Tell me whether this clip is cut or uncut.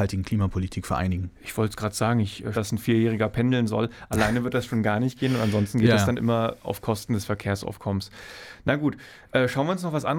cut